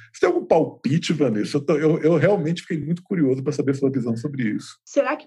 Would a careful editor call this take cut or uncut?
uncut